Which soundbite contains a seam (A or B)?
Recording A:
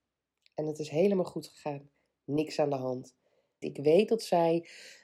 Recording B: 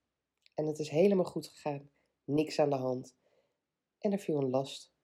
A